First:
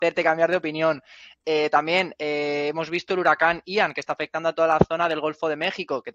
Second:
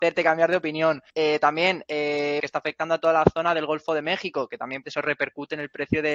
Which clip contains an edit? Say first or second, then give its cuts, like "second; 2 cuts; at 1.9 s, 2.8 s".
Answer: second; 3 cuts; at 1.1 s, 2.4 s, 4.8 s